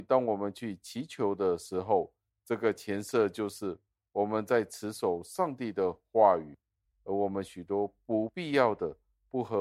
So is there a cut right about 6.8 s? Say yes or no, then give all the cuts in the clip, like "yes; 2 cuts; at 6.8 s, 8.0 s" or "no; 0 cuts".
yes; 2 cuts; at 2.3 s, 6.8 s